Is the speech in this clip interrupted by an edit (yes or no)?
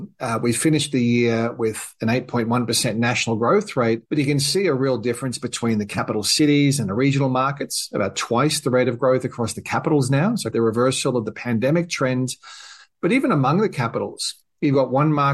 yes